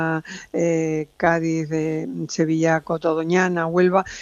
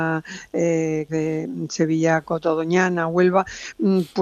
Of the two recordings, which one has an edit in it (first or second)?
second